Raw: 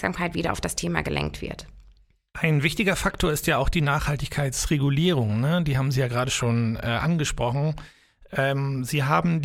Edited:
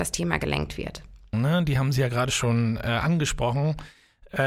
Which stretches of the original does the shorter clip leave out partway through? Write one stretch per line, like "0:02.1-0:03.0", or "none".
0:02.0-0:05.3